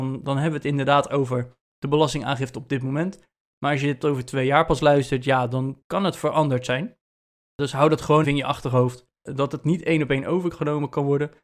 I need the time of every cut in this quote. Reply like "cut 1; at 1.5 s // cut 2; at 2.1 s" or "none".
cut 1; at 8.2 s